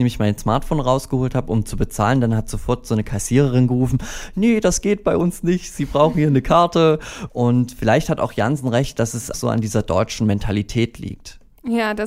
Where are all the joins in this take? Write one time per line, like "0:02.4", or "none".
0:07.3
0:09.3

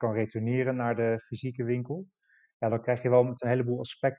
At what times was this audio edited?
none

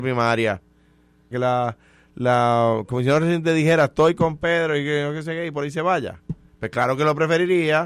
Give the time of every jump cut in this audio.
0:01.3

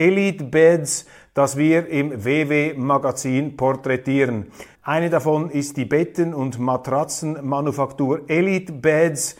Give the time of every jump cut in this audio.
0:04.7

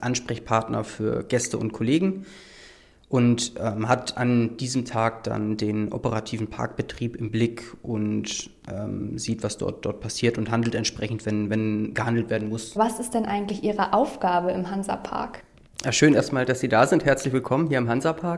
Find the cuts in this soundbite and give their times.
0:12.8

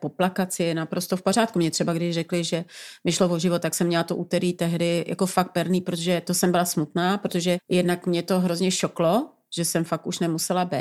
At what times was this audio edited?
0:07.6

